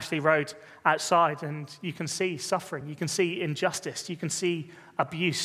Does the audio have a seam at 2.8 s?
no; 0 cuts

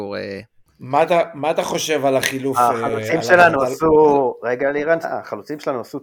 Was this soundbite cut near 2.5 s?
no; 1 cut; at 5.0 s

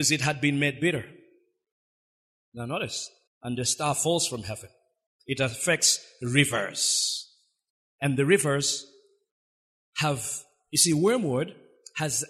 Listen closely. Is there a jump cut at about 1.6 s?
no; 2 cuts; at 3.3 s, 5.2 s

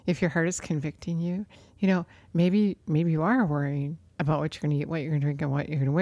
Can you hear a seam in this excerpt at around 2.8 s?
no; 0 cuts

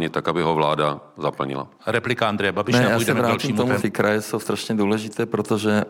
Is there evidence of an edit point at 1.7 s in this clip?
yes; 2 cuts; at 1.7 s, 3.8 s

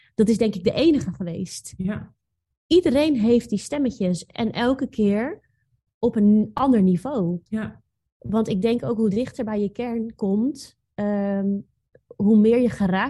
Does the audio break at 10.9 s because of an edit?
no; 1 cut; at 7.5 s

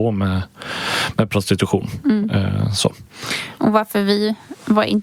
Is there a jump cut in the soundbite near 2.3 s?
no; 0 cuts

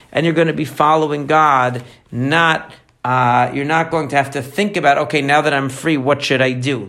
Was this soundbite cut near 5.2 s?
no; 0 cuts

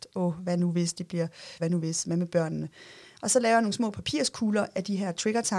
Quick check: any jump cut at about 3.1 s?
no; 1 cut; at 1.6 s

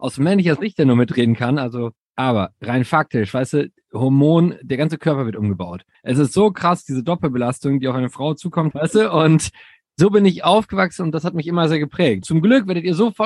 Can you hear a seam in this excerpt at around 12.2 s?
yes; 3 cuts; at 5.9 s, 8.7 s, 12.2 s

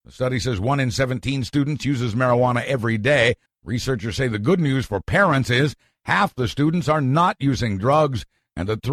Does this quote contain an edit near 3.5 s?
yes; 1 cut; at 3.5 s

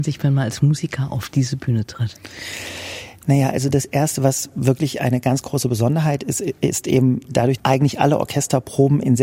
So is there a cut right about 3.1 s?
no; 1 cut; at 7.6 s

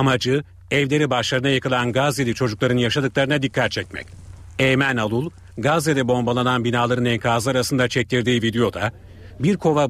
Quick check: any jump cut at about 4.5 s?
no; 0 cuts

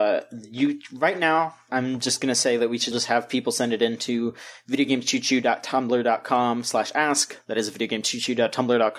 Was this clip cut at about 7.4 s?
no; 1 cut; at 2.9 s

